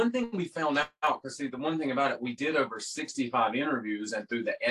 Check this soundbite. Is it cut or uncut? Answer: uncut